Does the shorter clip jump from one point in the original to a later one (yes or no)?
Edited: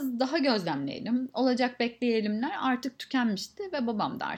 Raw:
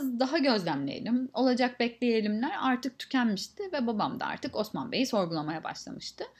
no